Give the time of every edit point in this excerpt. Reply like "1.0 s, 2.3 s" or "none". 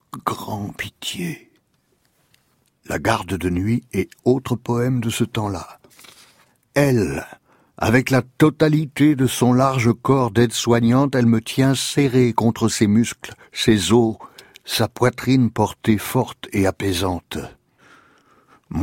none